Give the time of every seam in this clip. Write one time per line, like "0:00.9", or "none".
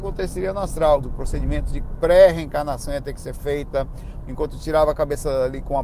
0:01.0
0:04.2